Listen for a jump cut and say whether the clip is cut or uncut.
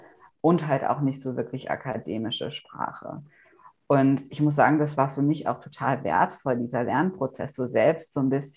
uncut